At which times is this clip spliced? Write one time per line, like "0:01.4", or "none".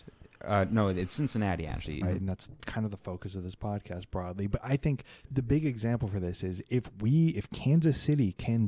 0:02.0
0:05.3